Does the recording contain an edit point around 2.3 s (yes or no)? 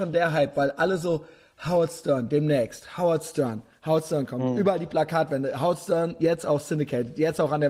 no